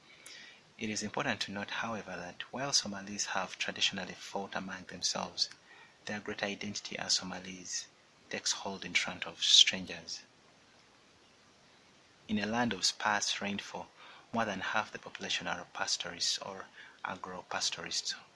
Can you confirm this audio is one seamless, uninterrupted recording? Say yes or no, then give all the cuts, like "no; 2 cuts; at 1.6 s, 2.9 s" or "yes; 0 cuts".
yes; 0 cuts